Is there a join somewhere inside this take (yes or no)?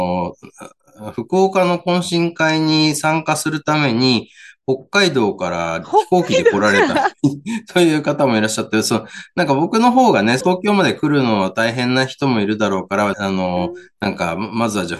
yes